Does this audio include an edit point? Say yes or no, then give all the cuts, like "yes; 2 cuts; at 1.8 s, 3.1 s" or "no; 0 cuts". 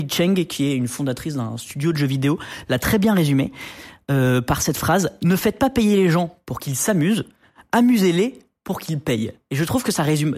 no; 0 cuts